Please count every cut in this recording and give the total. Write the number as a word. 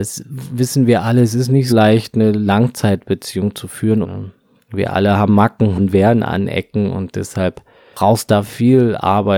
two